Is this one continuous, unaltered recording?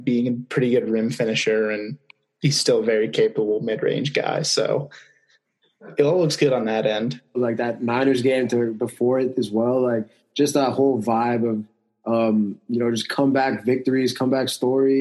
no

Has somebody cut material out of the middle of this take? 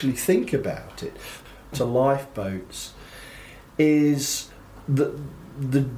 yes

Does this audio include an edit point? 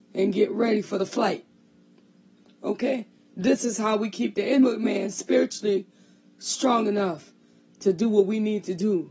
no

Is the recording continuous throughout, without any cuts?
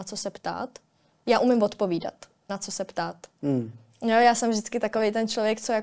no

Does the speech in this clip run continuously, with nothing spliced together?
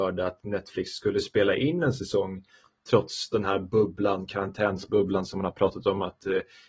yes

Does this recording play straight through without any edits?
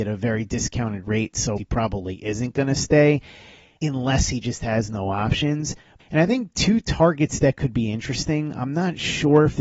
no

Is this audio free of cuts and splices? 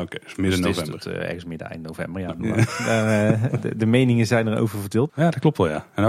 no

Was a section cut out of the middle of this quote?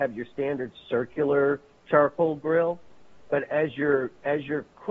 no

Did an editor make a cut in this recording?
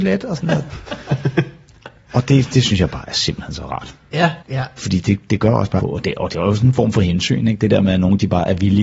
yes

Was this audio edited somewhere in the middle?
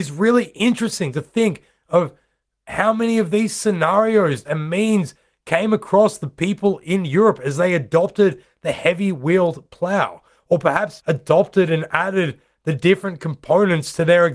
yes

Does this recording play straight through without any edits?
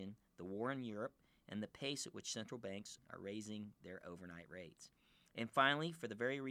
yes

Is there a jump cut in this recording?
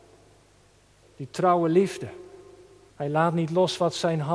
yes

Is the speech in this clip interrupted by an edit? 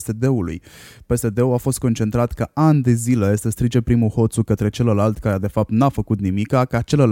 no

